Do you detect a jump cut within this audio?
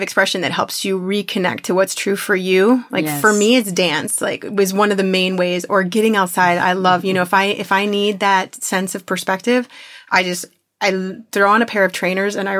no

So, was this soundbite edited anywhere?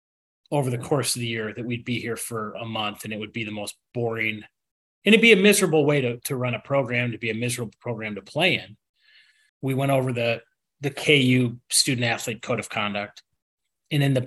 yes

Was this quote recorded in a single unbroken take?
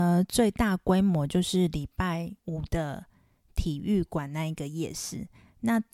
no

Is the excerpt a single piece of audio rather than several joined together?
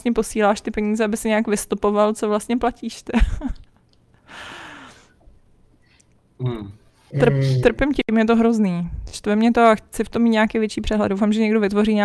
yes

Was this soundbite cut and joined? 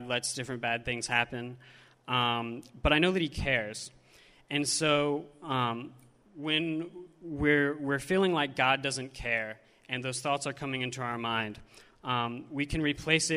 yes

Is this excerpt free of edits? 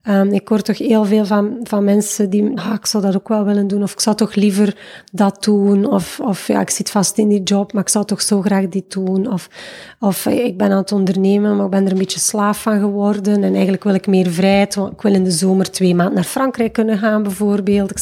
no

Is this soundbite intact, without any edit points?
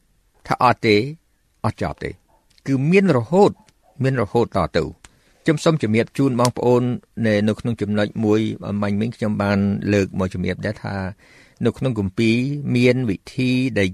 yes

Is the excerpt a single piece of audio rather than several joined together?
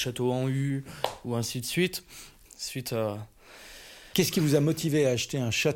no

